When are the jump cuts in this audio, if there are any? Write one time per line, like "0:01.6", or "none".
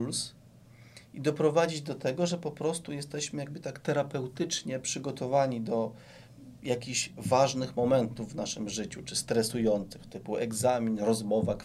none